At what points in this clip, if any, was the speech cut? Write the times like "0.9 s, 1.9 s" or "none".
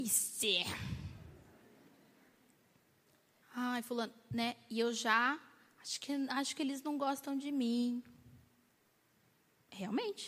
none